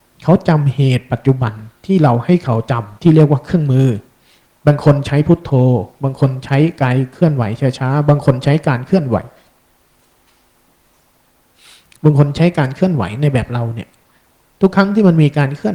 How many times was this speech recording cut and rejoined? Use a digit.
1